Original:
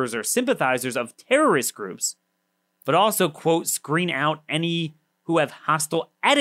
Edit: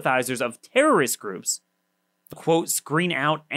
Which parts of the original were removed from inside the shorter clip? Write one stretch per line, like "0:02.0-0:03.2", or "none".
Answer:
0:02.9-0:03.3

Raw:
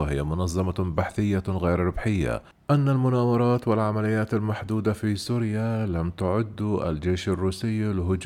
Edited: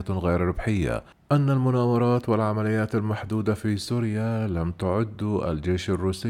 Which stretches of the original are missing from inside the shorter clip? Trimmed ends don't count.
none

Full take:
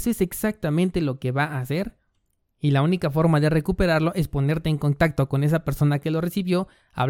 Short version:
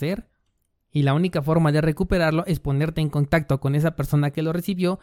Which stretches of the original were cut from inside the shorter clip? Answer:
none

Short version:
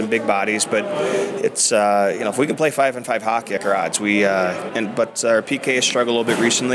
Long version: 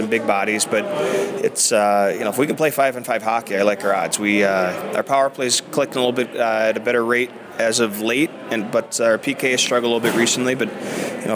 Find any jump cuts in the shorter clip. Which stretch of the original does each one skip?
0:03.6-0:03.8
0:04.9-0:08.5

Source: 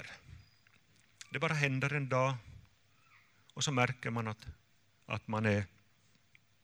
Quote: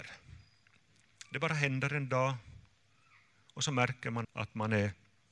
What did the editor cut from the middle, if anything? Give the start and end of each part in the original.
0:04.2-0:05.0

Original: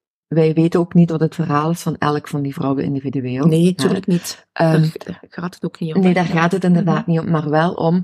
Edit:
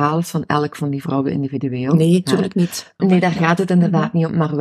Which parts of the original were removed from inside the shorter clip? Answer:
0:04.5-0:05.9

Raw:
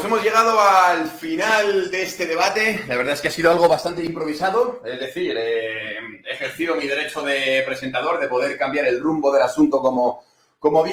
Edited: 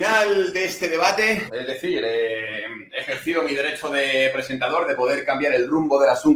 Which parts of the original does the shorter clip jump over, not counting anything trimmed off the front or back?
0:02.8-0:04.8

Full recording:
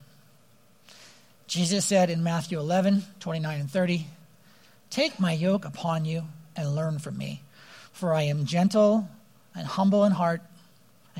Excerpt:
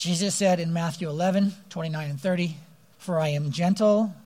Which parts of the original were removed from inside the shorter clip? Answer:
0:04.4-0:07.9

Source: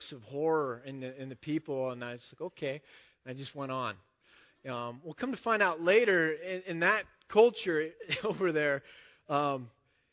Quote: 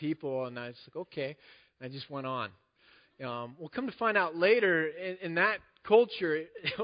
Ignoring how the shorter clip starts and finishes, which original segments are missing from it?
none

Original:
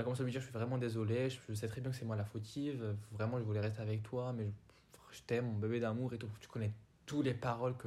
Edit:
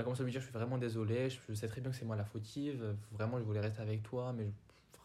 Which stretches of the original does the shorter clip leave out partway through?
none

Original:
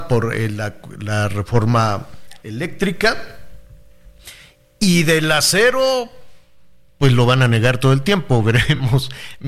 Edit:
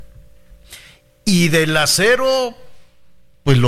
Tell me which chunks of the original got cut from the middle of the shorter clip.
none

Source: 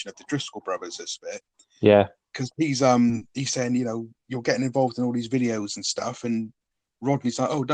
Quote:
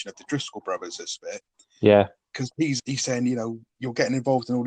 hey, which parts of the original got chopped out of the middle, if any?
0:02.8-0:03.3

